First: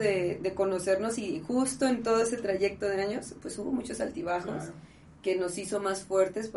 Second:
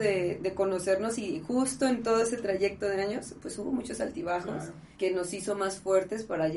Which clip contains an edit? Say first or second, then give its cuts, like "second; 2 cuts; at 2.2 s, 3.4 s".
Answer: second; 1 cut; at 4.9 s